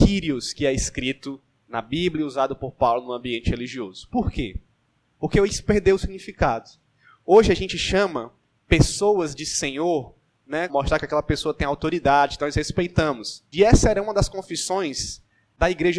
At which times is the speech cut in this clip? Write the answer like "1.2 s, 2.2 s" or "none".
10.7 s, 13.5 s